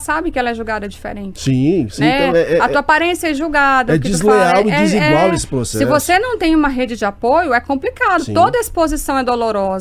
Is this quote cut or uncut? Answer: uncut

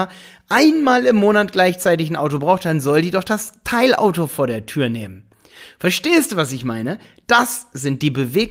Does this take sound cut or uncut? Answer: uncut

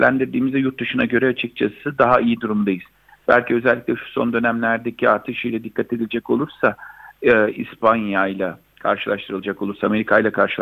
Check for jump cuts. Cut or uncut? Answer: uncut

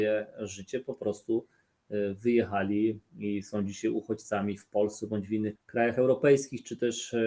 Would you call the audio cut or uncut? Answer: cut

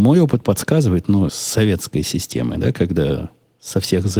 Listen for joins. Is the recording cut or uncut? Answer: cut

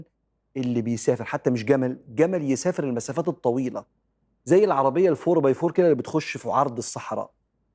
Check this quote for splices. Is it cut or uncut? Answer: uncut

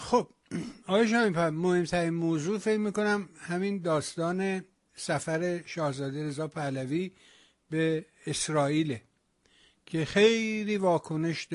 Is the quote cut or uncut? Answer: uncut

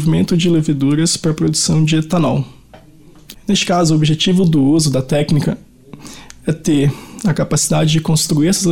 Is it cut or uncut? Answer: cut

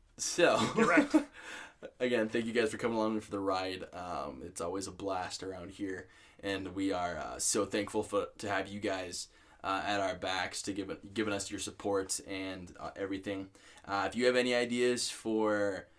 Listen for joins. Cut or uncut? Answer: uncut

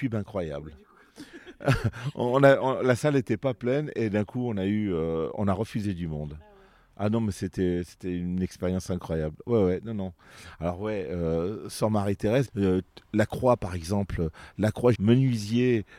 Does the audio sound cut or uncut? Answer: cut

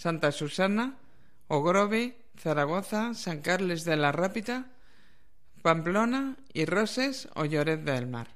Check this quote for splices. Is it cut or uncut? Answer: uncut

